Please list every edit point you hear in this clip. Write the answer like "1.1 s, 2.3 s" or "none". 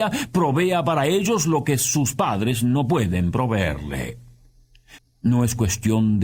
5.0 s

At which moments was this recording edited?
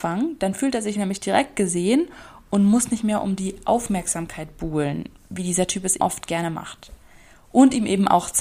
6.0 s

